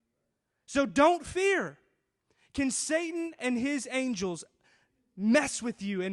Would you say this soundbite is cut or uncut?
uncut